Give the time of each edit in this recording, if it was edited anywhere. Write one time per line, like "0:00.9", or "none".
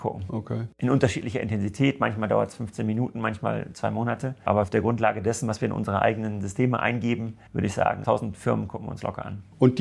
0:07.5